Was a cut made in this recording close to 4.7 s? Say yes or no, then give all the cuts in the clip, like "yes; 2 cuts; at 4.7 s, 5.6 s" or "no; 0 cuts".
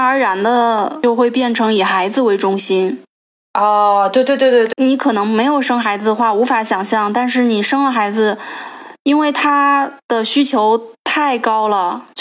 yes; 1 cut; at 4.7 s